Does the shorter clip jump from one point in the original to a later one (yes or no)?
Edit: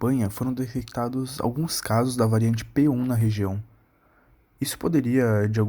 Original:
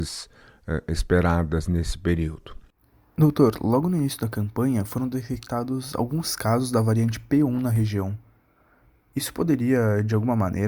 no